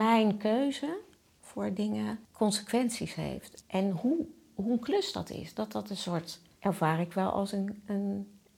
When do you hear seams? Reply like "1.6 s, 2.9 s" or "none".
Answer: 2.2 s, 3.6 s, 6.6 s